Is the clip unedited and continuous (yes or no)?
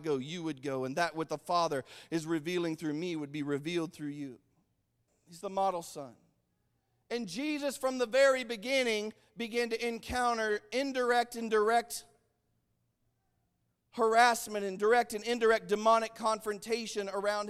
no